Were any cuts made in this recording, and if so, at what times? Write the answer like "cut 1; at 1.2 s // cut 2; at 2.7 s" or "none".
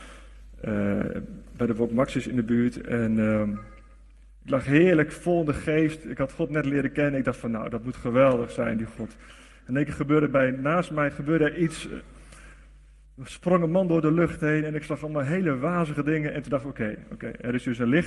none